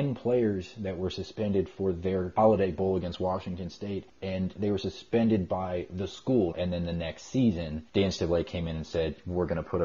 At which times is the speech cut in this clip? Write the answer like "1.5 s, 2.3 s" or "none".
6.5 s

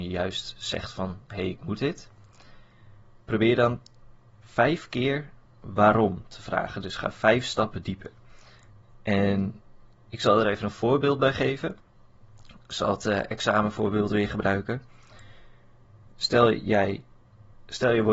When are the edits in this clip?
none

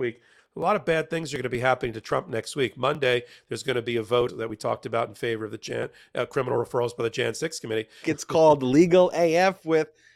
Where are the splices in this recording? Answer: 4.3 s, 8.0 s

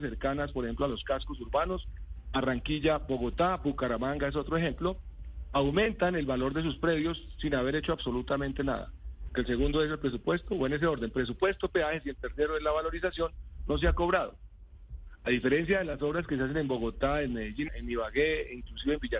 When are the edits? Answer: 9.3 s, 17.7 s

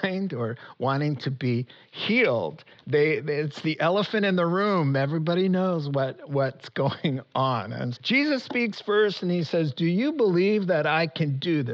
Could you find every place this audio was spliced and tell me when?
8.0 s

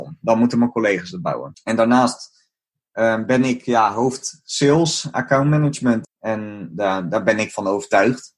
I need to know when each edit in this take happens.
1.5 s, 6.0 s

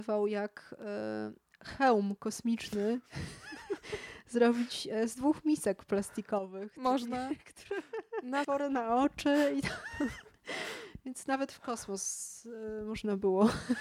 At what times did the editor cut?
8.4 s

